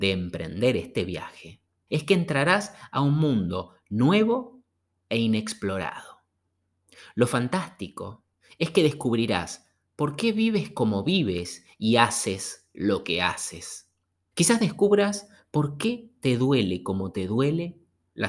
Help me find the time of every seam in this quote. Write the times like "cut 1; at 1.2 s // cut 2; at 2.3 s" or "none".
cut 1; at 1.9 s // cut 2; at 14.3 s

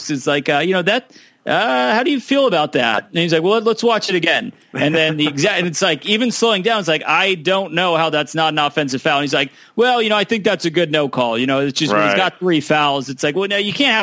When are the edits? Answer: none

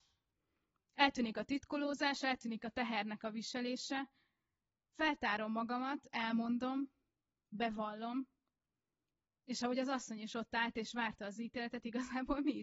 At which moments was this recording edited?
none

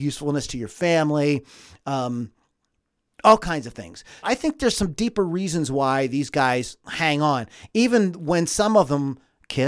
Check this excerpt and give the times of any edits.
cut 1; at 4.2 s

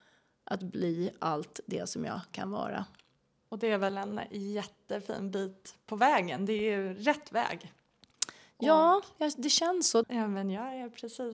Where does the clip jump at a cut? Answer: cut 1; at 10.0 s

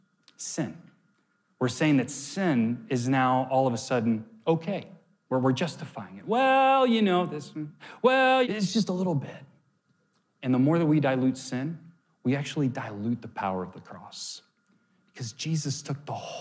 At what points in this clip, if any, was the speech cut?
cut 1; at 8.4 s

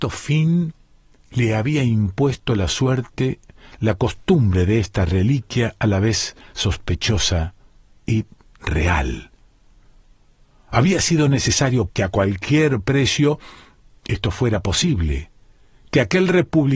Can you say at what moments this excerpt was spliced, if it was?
cut 1; at 11.9 s

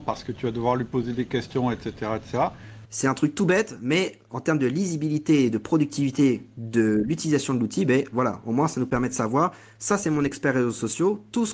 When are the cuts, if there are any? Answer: cut 1; at 2.8 s

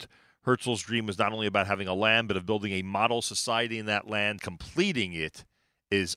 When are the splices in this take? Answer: cut 1; at 4.4 s

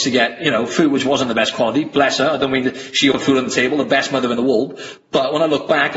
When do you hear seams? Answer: cut 1; at 3.1 s

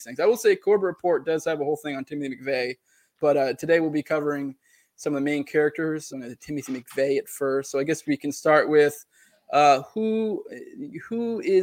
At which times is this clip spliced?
cut 1; at 3.1 s // cut 2; at 6.1 s

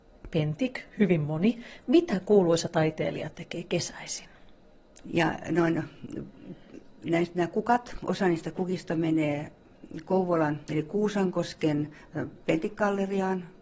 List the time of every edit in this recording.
cut 1; at 5.0 s

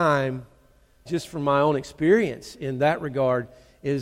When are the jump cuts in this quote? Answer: cut 1; at 1.1 s

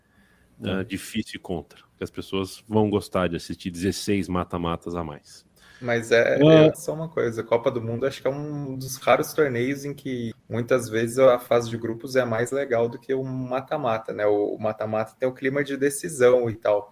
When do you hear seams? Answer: cut 1; at 6.7 s // cut 2; at 10.3 s

